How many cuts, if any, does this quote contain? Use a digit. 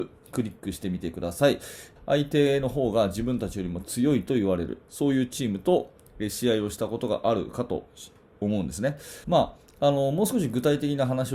2